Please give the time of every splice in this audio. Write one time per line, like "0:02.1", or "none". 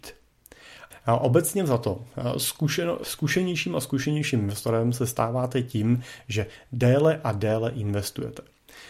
0:00.9
0:03.0